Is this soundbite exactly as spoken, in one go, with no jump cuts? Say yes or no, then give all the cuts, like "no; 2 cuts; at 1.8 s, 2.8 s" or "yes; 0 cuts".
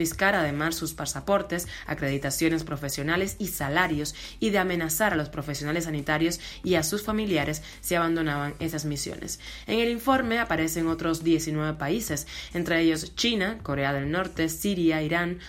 yes; 0 cuts